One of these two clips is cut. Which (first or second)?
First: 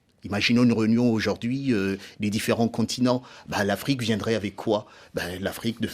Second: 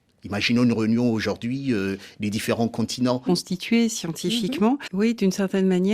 second